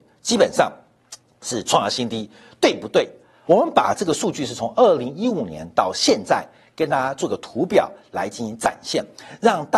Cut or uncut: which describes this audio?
cut